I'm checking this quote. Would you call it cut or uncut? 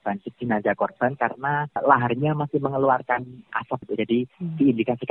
uncut